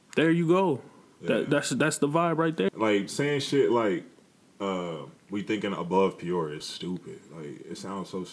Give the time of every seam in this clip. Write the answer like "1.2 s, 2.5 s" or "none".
2.7 s, 5.2 s, 6.6 s